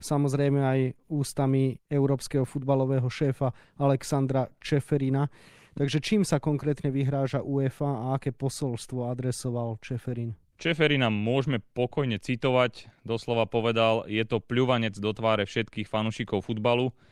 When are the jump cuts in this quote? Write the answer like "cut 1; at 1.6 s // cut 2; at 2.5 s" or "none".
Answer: none

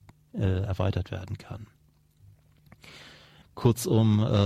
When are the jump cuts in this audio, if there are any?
cut 1; at 3.4 s

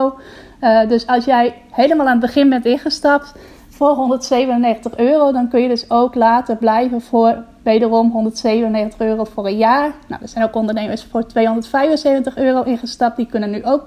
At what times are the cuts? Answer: none

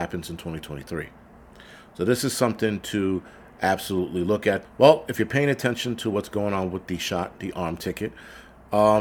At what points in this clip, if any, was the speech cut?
cut 1; at 4.6 s

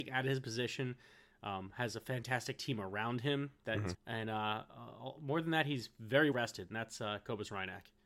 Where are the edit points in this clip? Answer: cut 1; at 3.9 s // cut 2; at 6.3 s

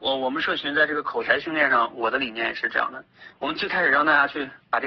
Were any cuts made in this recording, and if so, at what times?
none

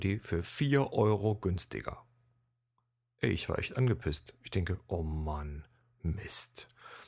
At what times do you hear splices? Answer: none

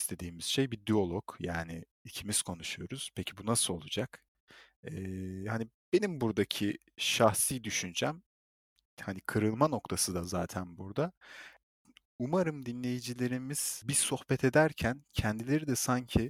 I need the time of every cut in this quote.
none

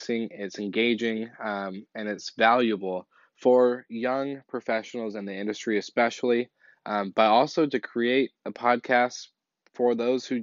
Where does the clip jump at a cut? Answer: cut 1; at 8.4 s

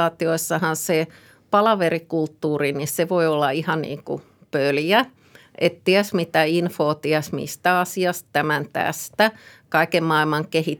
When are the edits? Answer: none

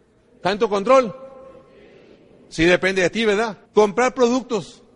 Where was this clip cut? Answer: cut 1; at 3.6 s

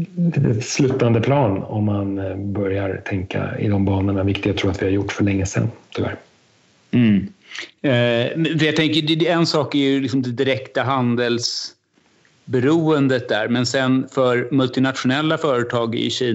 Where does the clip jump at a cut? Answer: none

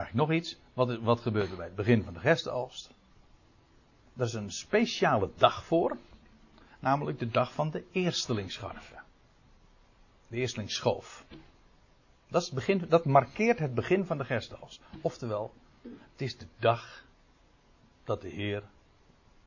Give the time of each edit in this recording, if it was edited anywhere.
none

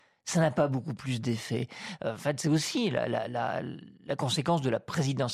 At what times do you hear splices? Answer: none

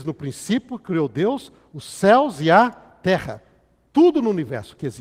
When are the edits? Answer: none

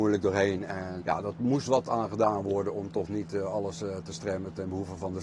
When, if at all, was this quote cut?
cut 1; at 1.0 s

